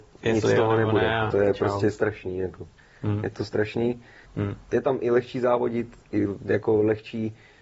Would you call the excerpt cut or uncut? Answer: cut